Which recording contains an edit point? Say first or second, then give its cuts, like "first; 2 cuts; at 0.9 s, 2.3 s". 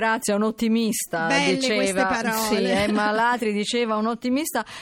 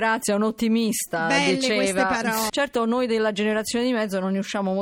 second; 1 cut; at 2.5 s